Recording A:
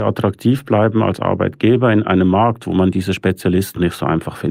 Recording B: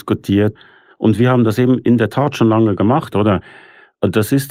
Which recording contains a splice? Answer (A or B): B